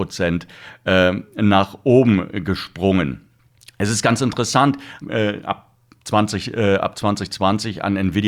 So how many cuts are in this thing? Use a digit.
1